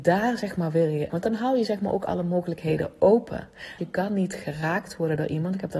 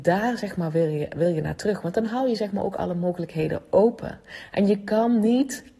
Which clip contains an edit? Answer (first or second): first